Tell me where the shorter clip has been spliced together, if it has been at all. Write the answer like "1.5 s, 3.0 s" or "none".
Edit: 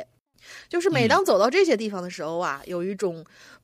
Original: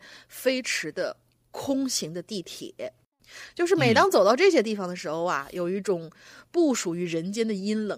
none